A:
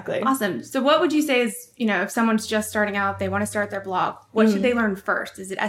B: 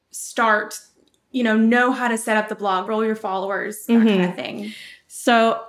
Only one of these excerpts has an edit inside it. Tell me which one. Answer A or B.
B